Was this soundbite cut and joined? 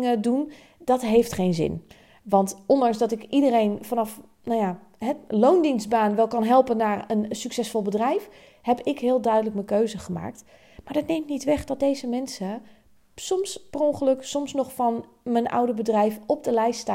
no; 0 cuts

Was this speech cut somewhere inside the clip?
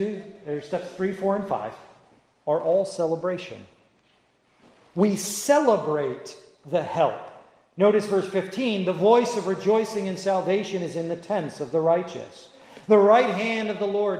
no; 0 cuts

